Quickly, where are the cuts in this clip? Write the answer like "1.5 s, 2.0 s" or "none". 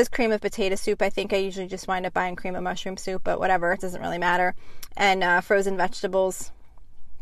none